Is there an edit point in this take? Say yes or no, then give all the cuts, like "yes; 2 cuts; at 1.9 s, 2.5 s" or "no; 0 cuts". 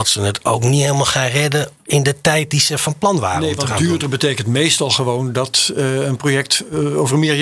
no; 0 cuts